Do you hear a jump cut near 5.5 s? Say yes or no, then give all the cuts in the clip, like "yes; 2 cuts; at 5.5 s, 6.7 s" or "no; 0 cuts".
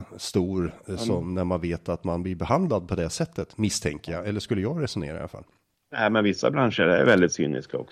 no; 0 cuts